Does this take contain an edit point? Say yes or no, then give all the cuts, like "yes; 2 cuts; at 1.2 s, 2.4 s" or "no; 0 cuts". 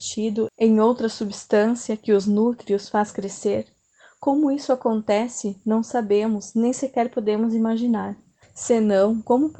yes; 1 cut; at 8.4 s